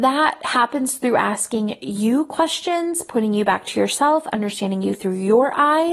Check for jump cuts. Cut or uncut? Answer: uncut